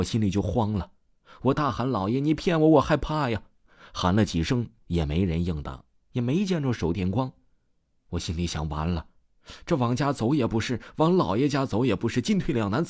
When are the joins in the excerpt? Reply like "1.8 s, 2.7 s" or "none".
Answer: none